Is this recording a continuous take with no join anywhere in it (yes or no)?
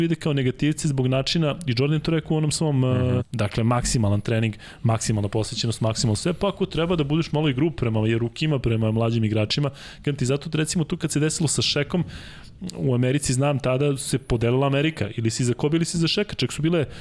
no